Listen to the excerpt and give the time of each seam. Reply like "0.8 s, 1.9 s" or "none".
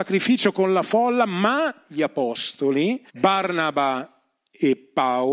3.1 s